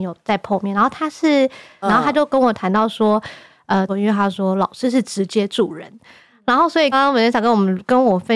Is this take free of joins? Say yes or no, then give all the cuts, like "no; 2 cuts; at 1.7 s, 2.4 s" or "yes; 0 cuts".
no; 3 cuts; at 1.8 s, 3.9 s, 6.9 s